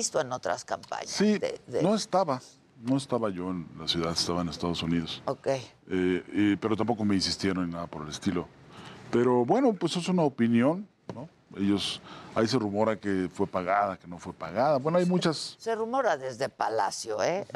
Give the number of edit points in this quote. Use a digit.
0